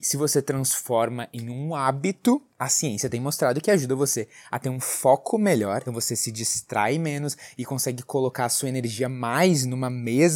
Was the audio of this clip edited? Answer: yes; 2 cuts; at 2.5 s, 5.9 s

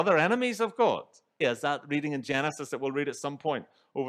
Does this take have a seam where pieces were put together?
yes; 1 cut; at 1.4 s

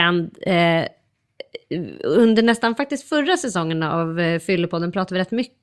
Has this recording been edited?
no; 0 cuts

